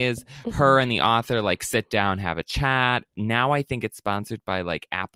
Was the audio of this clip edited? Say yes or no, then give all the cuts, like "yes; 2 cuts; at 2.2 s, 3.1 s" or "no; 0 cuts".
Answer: no; 0 cuts